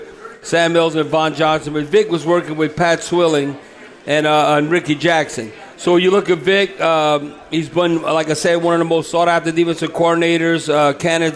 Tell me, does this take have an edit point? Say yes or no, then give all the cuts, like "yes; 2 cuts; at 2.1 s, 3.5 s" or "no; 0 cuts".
yes; 1 cut; at 5.7 s